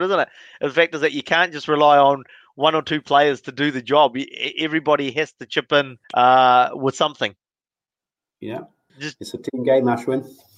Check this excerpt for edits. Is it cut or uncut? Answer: cut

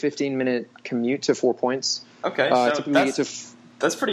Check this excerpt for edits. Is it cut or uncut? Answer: uncut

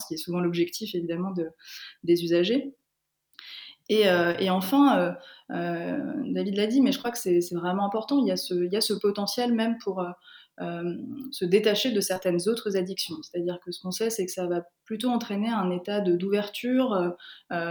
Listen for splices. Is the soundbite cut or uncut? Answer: uncut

